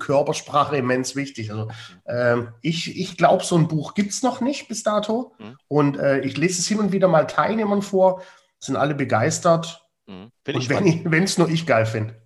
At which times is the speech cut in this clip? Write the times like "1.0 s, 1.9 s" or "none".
10.4 s

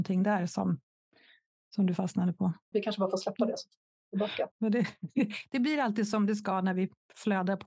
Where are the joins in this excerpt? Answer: 2.7 s, 4.5 s

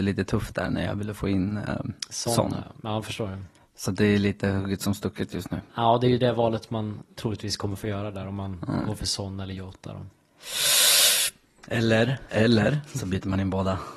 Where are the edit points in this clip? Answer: 12.3 s

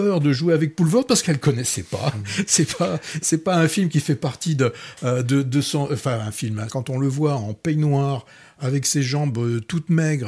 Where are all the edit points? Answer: 6.7 s

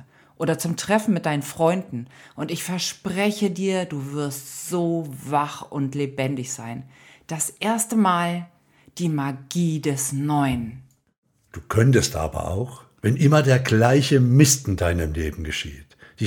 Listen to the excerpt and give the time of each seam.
none

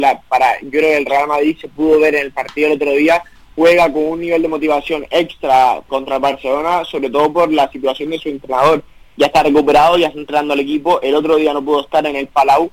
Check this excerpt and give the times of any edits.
5.9 s

